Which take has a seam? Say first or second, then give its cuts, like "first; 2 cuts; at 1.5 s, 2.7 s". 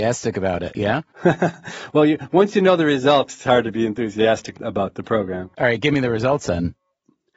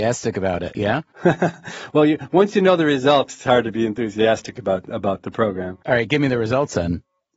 first; 1 cut; at 4.5 s